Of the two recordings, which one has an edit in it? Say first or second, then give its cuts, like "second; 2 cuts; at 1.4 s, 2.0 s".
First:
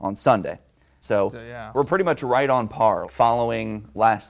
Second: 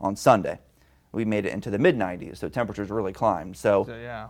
first; 2 cuts; at 1.0 s, 3.0 s